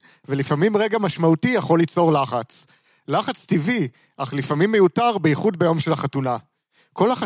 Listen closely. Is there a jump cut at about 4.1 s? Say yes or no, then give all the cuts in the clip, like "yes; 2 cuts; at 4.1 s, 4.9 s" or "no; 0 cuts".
no; 0 cuts